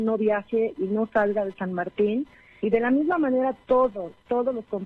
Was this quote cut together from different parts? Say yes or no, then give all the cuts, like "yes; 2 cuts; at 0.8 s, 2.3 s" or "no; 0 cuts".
no; 0 cuts